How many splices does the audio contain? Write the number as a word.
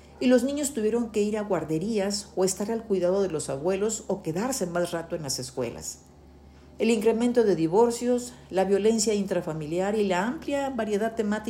zero